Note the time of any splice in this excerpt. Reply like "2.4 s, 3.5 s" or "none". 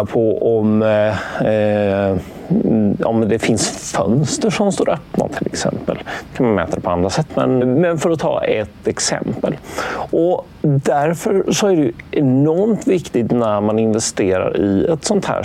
7.6 s